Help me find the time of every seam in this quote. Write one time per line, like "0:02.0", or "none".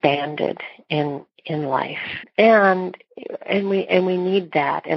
0:02.2